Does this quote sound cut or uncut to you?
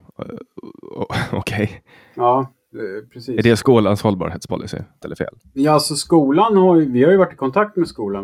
cut